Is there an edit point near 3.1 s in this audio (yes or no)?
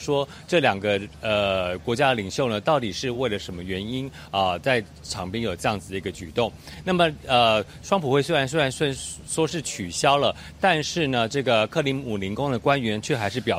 no